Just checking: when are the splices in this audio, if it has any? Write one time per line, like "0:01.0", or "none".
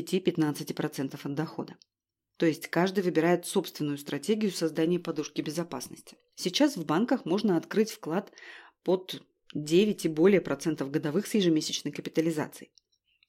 0:06.3